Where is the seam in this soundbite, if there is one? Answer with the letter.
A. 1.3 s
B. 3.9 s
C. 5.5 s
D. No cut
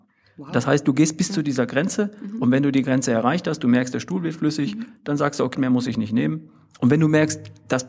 C